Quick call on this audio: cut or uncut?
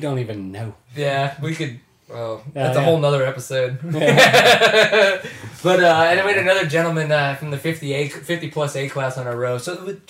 uncut